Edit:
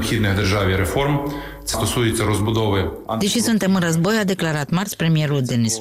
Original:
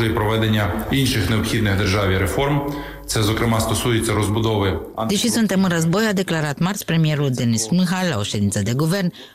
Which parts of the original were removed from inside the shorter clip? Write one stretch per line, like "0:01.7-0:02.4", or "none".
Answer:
0:03.2-0:03.6